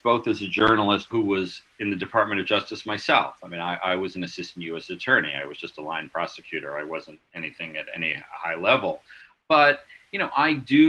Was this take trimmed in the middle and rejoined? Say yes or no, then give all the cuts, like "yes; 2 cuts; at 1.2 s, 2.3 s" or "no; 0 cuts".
yes; 1 cut; at 1.1 s